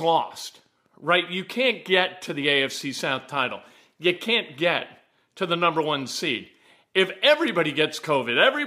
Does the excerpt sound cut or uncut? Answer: uncut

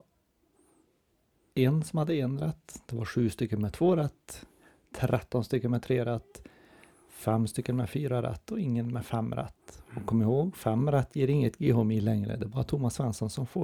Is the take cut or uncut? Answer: uncut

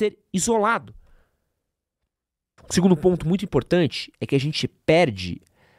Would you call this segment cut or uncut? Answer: cut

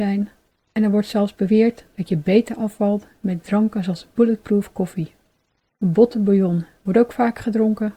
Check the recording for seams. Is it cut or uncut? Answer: uncut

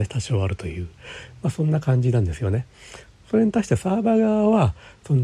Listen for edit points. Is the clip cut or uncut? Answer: uncut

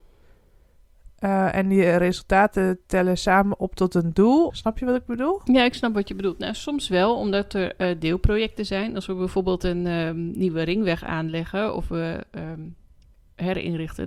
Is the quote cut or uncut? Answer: cut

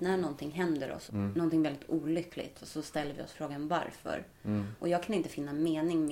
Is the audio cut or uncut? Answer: cut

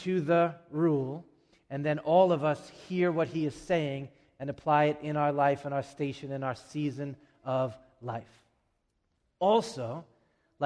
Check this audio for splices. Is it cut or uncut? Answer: uncut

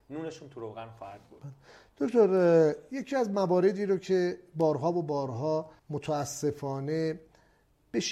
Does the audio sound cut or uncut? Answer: cut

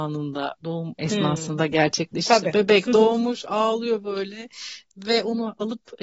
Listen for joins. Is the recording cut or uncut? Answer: uncut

